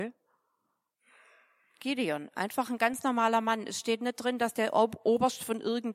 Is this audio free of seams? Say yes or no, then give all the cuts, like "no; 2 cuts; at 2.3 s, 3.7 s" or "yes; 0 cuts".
yes; 0 cuts